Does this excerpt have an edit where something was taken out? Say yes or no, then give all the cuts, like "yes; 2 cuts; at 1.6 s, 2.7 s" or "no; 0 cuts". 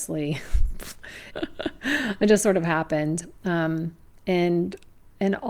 yes; 1 cut; at 1.3 s